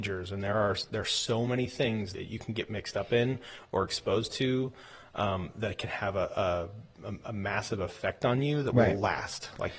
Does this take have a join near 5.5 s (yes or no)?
no